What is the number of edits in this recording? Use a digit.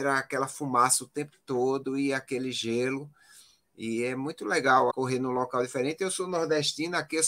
1